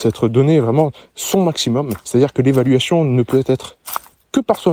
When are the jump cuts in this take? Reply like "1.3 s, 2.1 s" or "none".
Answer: none